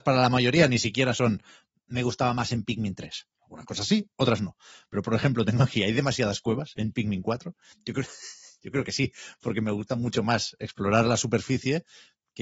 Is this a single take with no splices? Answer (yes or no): yes